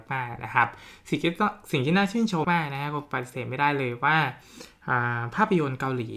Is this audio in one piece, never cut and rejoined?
no; 1 cut; at 2.4 s

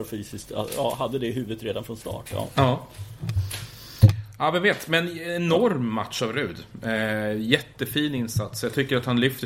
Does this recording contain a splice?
no; 0 cuts

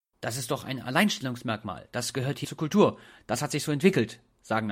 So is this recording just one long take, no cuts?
no; 1 cut; at 2.4 s

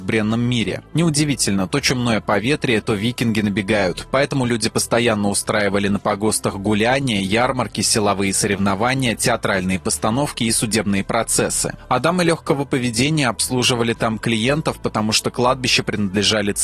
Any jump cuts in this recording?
no; 0 cuts

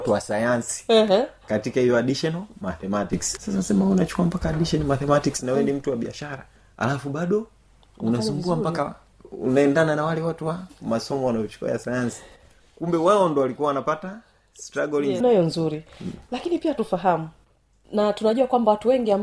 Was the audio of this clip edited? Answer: yes; 2 cuts; at 3.4 s, 15.2 s

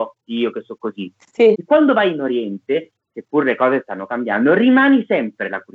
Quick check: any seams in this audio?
yes; 1 cut; at 1.5 s

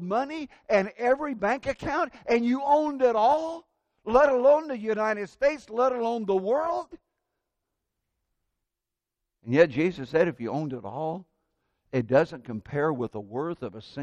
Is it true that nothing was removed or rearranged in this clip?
yes; 0 cuts

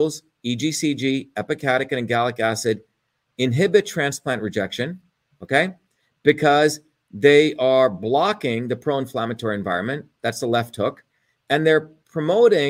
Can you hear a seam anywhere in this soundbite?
no; 0 cuts

